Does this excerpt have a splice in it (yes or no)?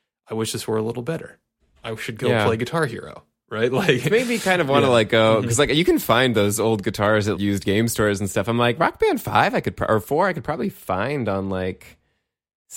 yes